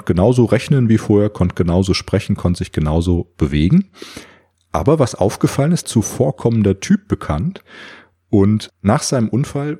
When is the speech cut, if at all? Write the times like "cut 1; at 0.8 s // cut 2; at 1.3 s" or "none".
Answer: cut 1; at 5.8 s

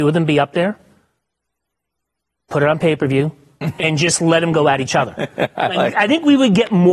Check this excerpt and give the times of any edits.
none

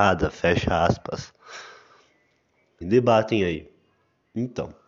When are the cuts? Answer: cut 1; at 2.8 s

